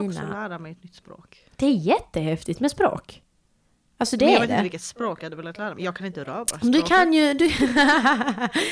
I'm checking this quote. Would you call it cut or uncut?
uncut